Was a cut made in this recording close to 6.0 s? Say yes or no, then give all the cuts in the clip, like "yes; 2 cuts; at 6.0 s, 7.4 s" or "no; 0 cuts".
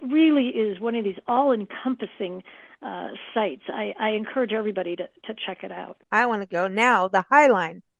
yes; 1 cut; at 6.0 s